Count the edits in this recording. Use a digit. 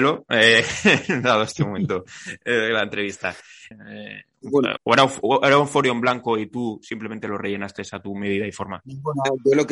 2